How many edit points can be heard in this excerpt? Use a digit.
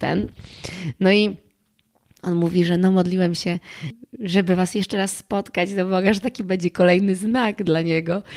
0